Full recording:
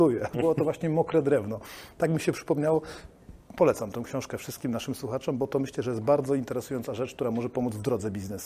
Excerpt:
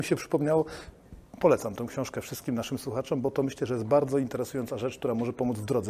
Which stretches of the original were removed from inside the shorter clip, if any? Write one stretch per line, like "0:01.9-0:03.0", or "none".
none